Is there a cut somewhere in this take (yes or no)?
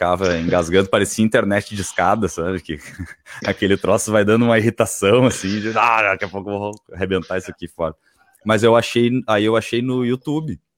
no